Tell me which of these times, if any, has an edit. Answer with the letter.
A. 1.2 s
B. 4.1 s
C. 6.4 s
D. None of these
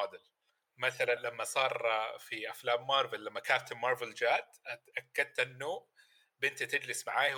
A